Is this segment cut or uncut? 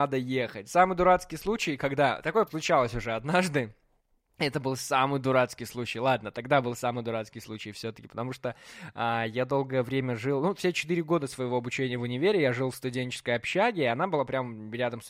cut